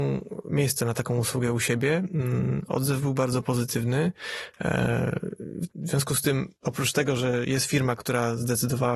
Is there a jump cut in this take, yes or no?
yes